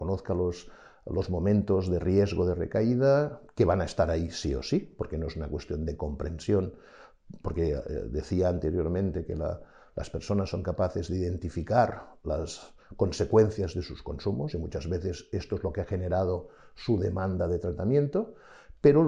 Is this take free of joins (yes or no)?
yes